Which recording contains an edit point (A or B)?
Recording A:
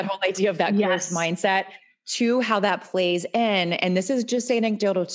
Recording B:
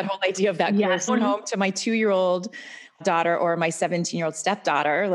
B